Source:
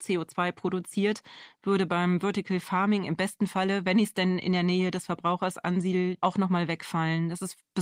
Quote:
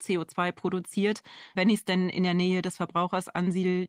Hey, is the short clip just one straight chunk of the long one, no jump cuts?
no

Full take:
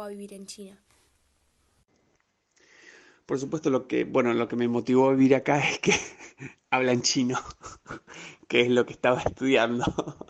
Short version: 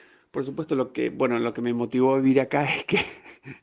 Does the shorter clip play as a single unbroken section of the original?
yes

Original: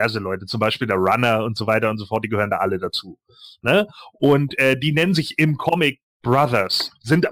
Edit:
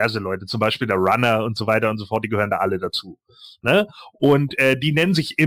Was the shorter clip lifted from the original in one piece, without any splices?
yes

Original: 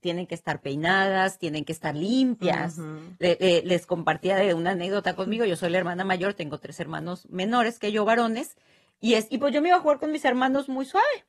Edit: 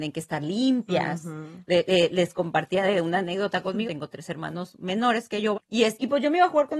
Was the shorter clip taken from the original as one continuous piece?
no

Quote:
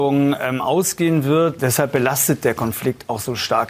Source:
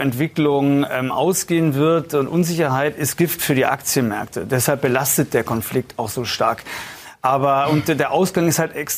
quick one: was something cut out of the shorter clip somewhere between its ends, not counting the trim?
yes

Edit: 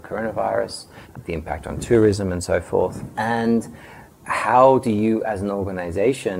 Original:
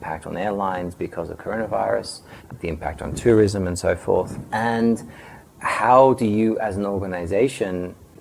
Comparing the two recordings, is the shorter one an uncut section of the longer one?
yes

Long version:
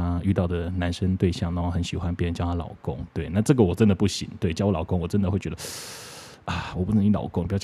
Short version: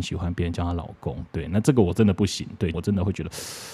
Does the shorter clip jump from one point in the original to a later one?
yes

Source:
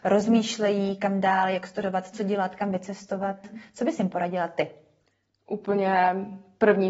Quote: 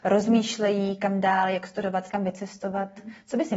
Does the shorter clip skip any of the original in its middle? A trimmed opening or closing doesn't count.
yes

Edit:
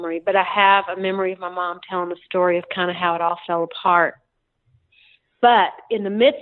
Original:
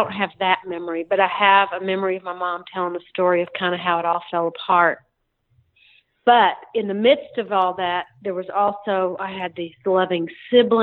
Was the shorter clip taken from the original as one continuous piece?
yes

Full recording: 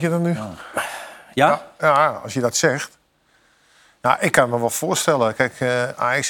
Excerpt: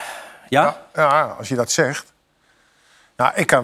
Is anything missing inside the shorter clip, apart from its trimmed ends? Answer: no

